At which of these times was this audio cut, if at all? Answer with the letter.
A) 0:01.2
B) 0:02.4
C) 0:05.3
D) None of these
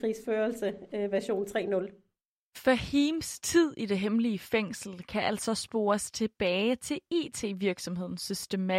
D